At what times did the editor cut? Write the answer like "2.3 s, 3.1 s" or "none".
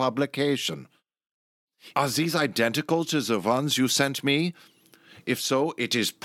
1.9 s

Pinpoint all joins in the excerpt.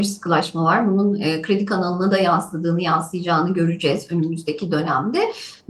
none

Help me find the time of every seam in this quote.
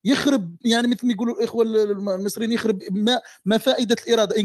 none

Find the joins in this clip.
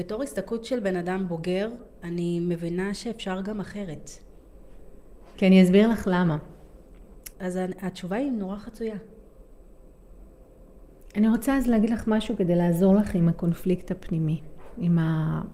5.3 s, 7.3 s

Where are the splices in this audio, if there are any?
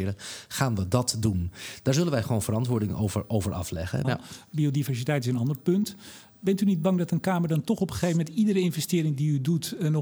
4.0 s

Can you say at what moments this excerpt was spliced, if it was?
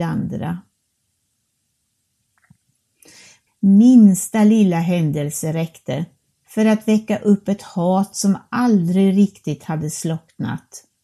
3.5 s

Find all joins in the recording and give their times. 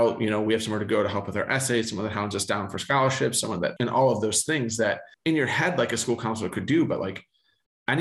3.8 s, 5.1 s

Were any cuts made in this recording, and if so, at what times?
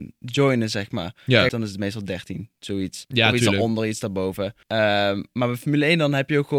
1.5 s, 4.6 s

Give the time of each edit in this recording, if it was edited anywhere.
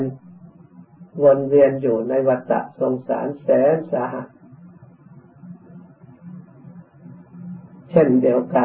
1.1 s

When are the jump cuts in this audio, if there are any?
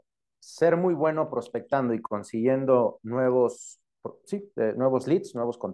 4.2 s

